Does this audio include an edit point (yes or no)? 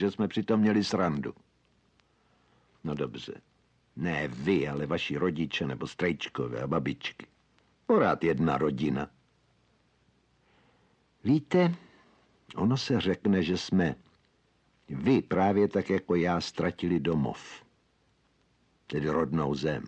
no